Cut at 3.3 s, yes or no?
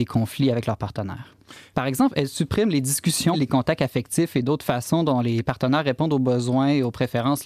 yes